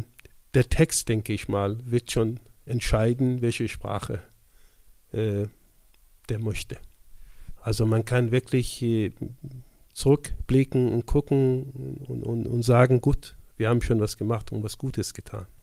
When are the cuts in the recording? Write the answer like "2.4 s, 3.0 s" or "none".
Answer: 7.6 s